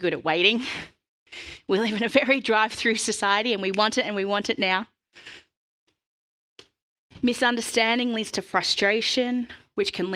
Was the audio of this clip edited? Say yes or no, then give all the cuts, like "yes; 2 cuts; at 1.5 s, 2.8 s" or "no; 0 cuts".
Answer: no; 0 cuts